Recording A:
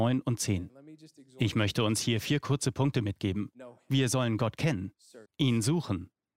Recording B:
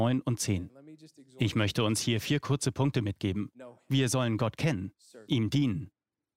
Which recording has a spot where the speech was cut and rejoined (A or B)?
A